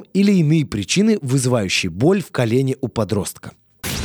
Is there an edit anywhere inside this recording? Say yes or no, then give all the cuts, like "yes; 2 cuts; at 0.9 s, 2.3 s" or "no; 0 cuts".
no; 0 cuts